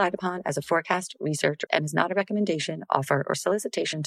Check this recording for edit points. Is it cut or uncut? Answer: cut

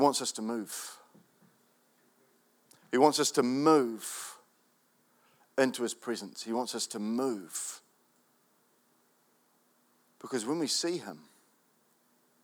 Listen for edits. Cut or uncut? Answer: uncut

